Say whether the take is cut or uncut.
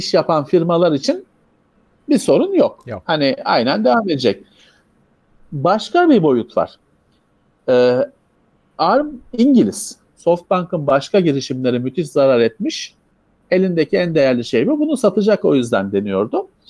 cut